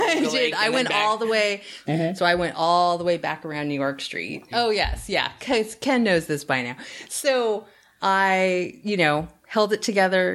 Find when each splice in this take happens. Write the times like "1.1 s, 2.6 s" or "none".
1.9 s, 4.5 s